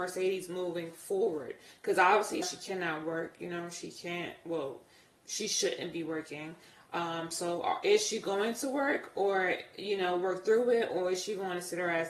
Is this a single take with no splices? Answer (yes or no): no